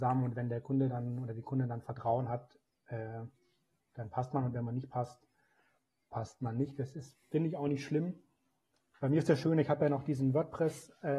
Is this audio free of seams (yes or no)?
yes